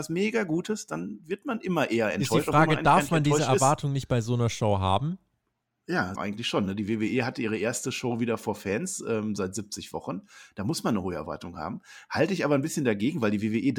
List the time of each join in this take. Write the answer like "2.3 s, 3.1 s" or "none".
6.2 s